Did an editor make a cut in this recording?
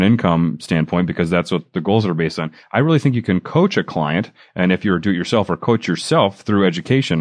no; 0 cuts

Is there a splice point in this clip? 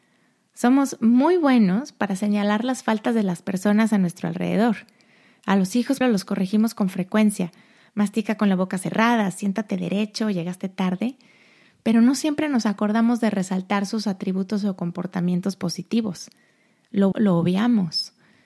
yes; 2 cuts; at 6.0 s, 17.1 s

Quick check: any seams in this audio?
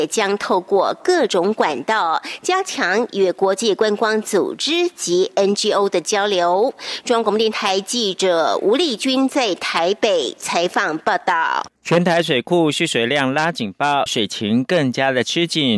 yes; 2 cuts; at 11.8 s, 14.1 s

